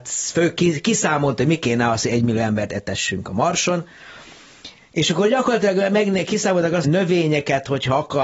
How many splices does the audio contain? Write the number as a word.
one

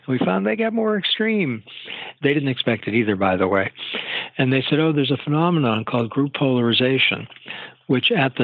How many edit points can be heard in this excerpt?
one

